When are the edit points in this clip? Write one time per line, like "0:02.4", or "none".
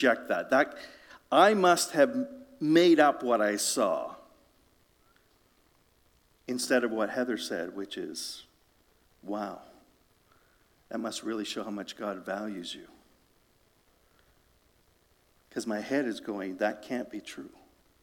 none